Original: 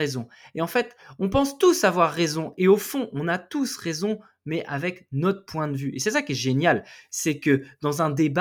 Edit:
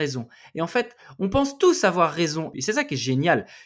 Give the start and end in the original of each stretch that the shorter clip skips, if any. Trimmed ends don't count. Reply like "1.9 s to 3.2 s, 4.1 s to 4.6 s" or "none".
2.5 s to 5.9 s